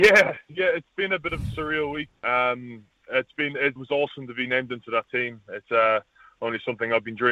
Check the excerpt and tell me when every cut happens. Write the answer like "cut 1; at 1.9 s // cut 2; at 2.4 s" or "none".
cut 1; at 2.2 s // cut 2; at 3.8 s